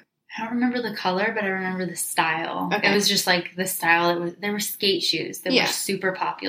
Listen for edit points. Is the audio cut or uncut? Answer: uncut